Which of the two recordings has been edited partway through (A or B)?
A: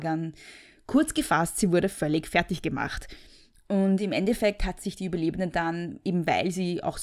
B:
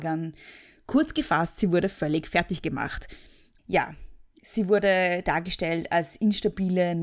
B